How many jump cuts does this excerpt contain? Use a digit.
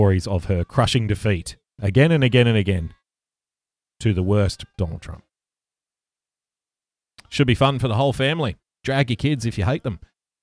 1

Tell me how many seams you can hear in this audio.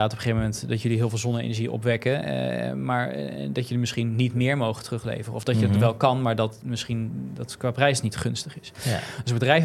0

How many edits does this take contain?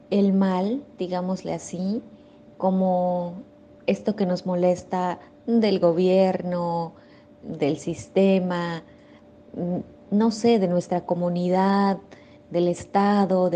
0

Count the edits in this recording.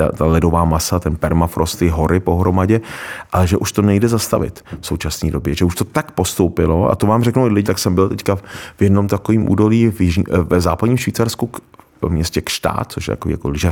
1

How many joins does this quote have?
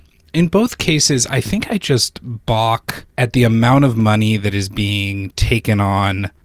1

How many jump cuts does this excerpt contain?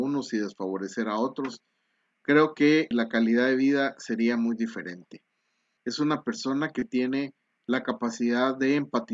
2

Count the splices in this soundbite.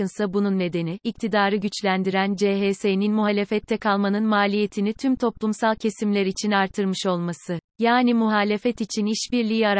2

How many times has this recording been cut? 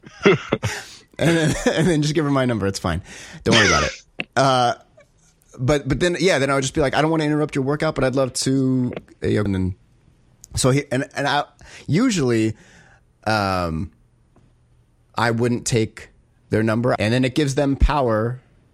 2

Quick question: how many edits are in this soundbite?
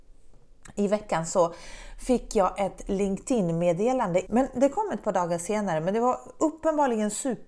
1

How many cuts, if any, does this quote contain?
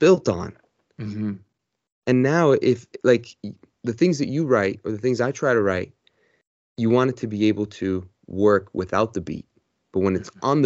0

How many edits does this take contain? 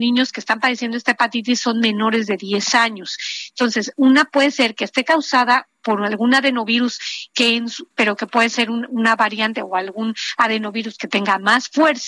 1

